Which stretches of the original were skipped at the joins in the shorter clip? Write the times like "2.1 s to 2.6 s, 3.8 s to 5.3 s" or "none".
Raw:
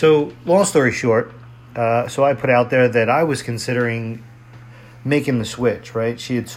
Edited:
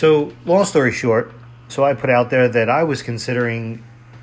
1.7 s to 2.1 s